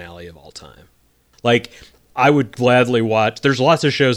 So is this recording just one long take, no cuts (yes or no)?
no